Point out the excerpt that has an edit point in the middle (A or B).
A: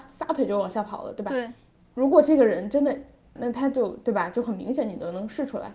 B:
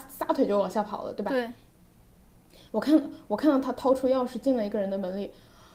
A